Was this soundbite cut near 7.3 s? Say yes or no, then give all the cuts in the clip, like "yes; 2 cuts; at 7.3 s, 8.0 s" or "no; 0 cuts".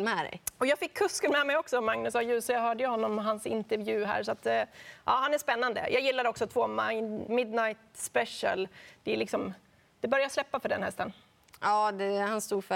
yes; 1 cut; at 7.3 s